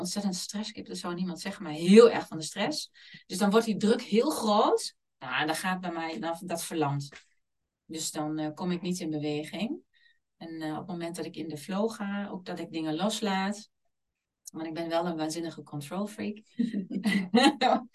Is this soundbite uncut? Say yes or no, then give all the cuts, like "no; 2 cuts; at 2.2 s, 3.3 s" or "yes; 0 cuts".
yes; 0 cuts